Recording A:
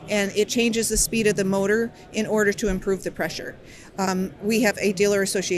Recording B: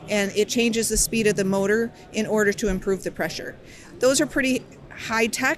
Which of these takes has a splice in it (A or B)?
A